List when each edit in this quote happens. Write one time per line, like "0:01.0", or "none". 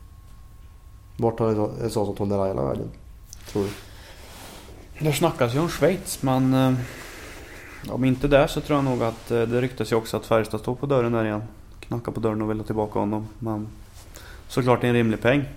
none